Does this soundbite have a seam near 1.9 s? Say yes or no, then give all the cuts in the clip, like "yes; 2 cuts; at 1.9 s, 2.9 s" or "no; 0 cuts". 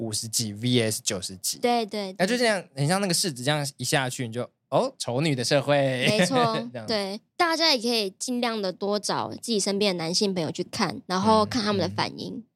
yes; 1 cut; at 1.9 s